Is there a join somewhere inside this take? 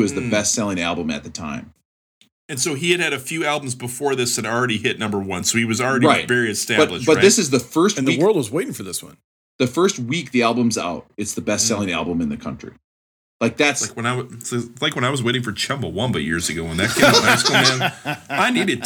no; 0 cuts

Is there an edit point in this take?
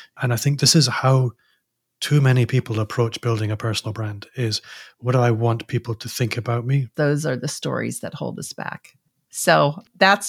yes; 1 cut; at 6.9 s

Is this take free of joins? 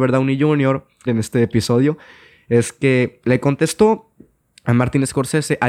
no; 1 cut; at 1.1 s

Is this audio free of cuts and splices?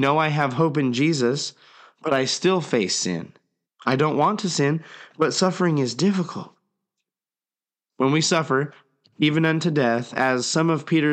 no; 2 cuts; at 3.6 s, 7.9 s

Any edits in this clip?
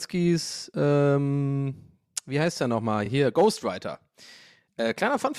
no; 0 cuts

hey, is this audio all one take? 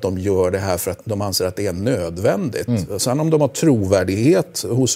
no; 1 cut; at 1.0 s

